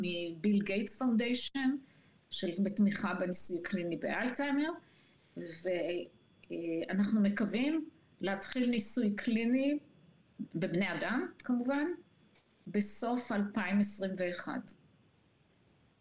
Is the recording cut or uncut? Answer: uncut